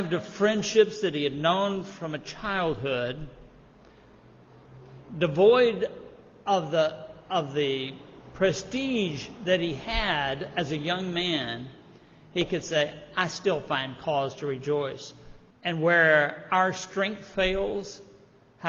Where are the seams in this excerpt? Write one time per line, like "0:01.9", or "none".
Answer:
0:15.5

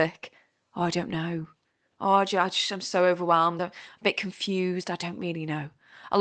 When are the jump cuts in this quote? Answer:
none

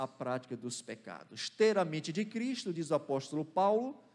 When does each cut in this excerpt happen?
none

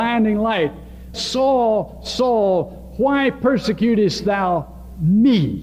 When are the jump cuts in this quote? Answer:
0:01.1

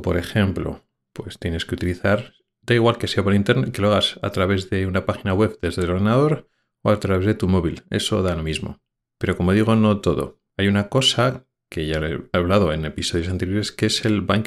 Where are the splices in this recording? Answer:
0:09.0
0:10.5

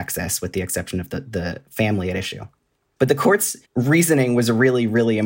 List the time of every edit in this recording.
0:03.6

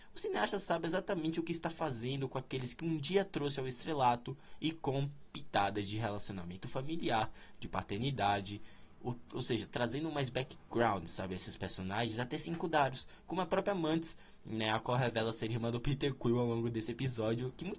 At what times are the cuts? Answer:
none

